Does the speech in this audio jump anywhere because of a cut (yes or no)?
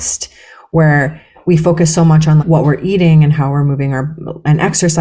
yes